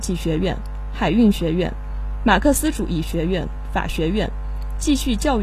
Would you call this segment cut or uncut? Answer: uncut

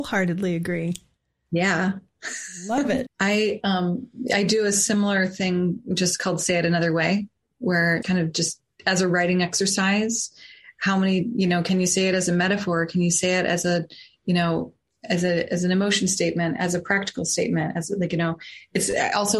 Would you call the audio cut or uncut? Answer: cut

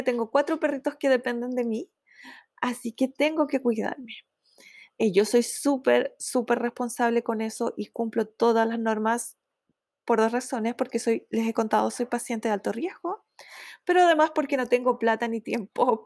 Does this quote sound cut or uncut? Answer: cut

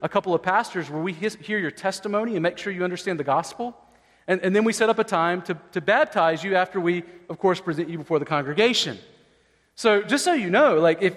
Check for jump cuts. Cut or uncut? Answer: uncut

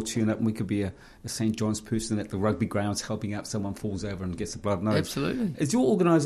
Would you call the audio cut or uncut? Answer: uncut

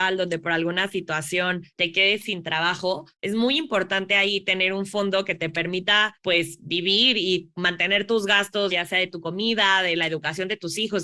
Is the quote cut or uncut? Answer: cut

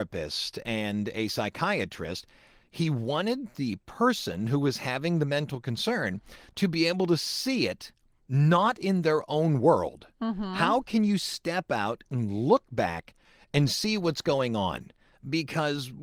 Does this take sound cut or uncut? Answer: uncut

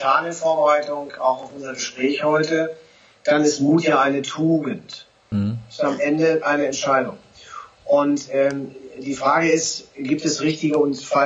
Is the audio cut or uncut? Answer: cut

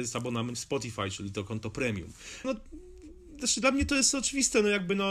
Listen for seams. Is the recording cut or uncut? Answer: cut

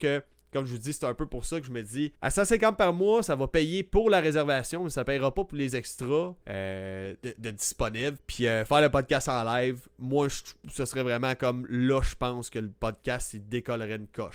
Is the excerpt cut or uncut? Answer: cut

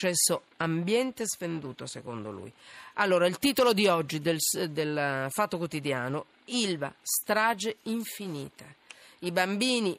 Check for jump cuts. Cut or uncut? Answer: uncut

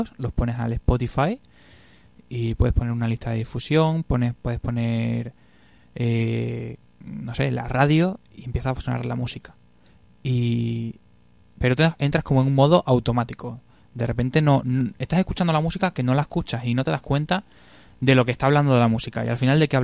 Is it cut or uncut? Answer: uncut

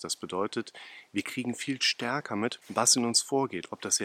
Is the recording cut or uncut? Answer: cut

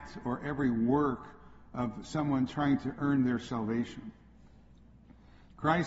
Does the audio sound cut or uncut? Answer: uncut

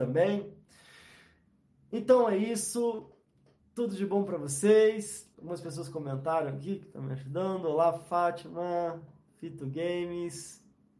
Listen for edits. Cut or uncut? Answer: cut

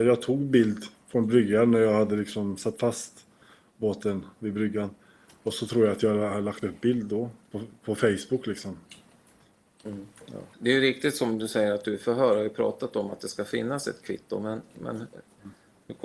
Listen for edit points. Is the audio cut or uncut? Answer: cut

